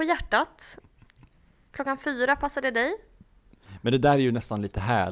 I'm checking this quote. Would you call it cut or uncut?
uncut